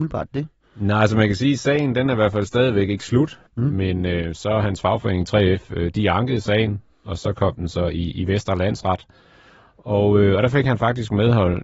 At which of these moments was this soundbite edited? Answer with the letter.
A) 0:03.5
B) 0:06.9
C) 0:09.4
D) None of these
A